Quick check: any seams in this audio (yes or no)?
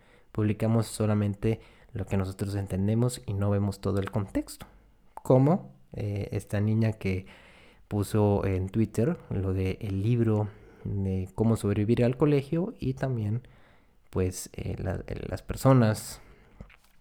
no